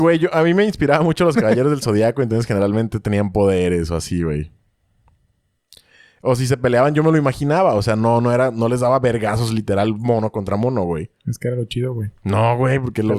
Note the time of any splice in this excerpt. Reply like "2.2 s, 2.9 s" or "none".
none